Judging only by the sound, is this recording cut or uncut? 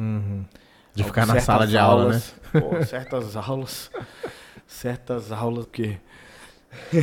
cut